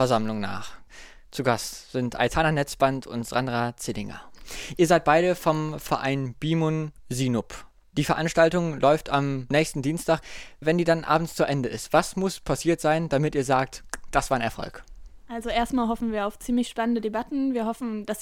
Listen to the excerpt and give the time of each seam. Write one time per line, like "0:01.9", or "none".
none